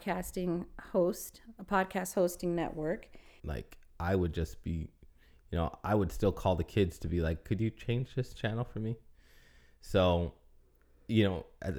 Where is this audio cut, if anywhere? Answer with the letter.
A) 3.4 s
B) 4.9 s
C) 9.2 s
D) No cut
A